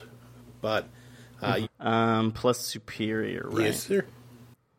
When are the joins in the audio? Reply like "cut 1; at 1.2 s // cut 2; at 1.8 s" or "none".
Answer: cut 1; at 1.6 s